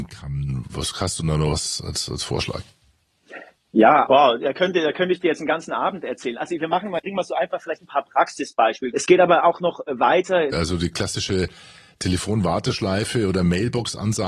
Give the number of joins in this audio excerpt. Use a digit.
3